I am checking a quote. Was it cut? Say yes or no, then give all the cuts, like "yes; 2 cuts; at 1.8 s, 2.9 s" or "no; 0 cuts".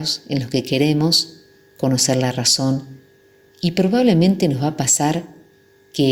no; 0 cuts